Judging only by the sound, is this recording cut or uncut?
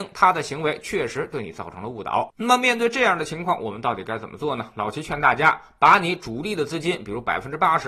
cut